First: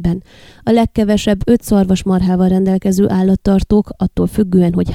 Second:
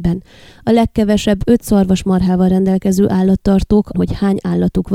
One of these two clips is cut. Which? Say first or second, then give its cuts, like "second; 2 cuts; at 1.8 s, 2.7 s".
second; 1 cut; at 3.9 s